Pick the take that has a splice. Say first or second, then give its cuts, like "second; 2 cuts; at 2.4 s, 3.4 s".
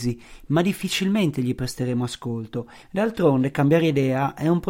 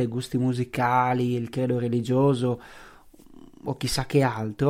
first; 1 cut; at 2.8 s